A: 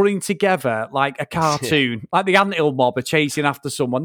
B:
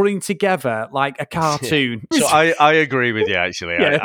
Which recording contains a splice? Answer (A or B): B